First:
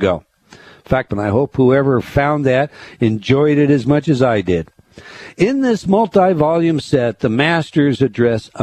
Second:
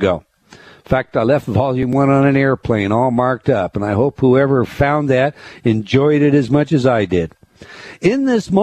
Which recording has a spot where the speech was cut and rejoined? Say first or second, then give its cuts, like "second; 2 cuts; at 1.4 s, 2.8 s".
first; 1 cut; at 1.1 s